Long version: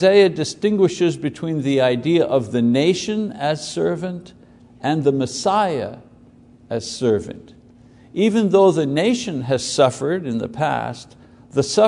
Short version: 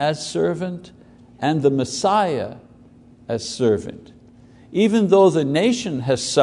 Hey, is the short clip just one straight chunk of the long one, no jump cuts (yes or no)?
yes